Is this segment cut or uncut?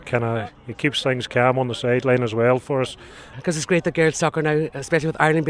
cut